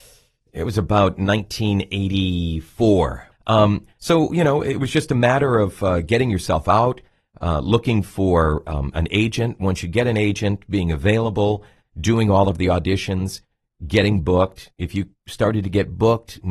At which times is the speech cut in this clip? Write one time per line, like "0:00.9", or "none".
0:03.3